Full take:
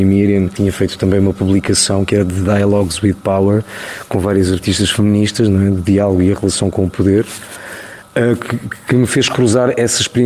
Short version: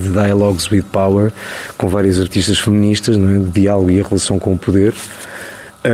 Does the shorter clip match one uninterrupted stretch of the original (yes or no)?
yes